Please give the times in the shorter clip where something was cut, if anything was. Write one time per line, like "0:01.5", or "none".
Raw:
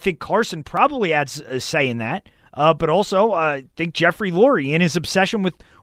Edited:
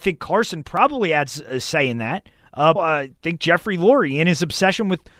0:02.8